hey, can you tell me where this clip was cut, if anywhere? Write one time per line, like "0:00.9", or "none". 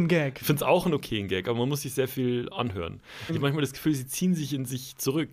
0:03.3